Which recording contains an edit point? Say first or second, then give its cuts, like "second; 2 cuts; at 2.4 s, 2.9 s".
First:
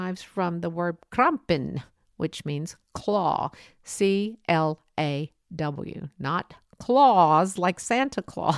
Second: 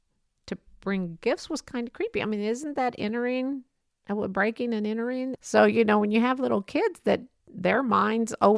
second; 1 cut; at 5.4 s